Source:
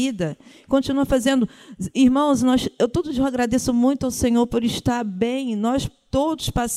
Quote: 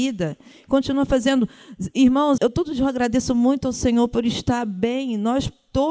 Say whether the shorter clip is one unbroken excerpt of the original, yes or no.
no